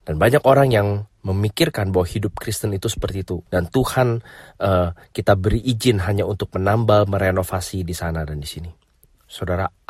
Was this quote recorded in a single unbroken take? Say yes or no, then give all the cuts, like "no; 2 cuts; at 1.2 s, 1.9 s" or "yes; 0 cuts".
no; 1 cut; at 3.5 s